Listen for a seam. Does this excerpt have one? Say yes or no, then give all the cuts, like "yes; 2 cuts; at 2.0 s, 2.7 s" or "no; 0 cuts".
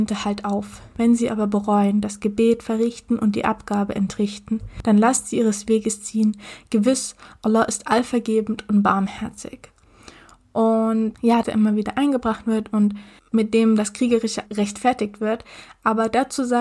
yes; 2 cuts; at 11.4 s, 14.4 s